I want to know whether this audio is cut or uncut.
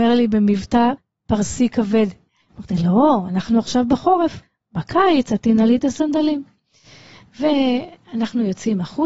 cut